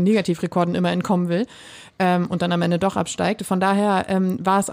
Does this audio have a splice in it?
no; 0 cuts

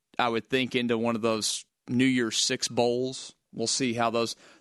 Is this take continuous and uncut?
no; 1 cut; at 1.7 s

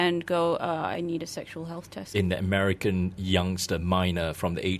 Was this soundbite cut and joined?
yes; 2 cuts; at 2.1 s, 3.2 s

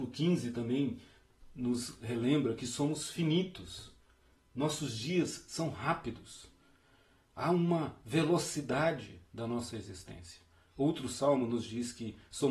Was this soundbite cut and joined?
no; 0 cuts

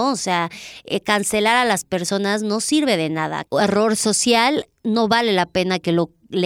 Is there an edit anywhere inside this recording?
yes; 1 cut; at 3.4 s

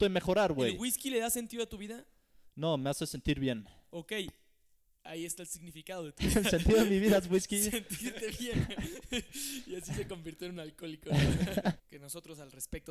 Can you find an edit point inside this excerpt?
yes; 1 cut; at 11.8 s

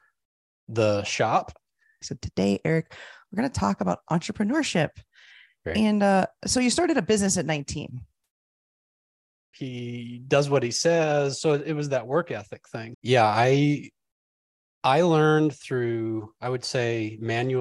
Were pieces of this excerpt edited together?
yes; 3 cuts; at 2.0 s, 9.5 s, 12.9 s

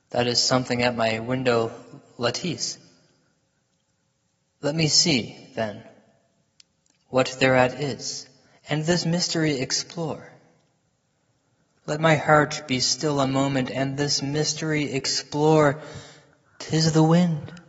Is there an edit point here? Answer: no; 0 cuts

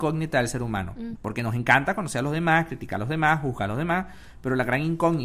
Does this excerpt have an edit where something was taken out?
yes; 1 cut; at 1.1 s

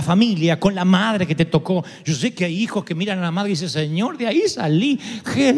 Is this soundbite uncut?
yes; 0 cuts

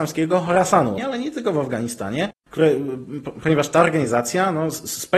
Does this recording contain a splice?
yes; 1 cut; at 1.0 s

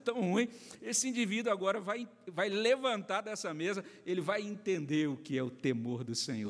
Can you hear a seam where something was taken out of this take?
no; 0 cuts

